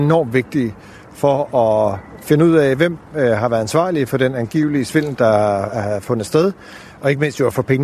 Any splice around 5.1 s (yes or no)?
yes